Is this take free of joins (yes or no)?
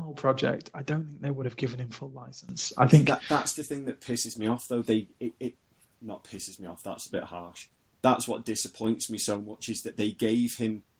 yes